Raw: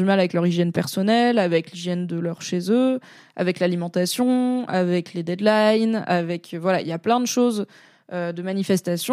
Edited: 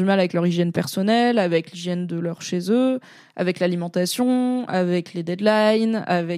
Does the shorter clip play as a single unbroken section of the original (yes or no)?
yes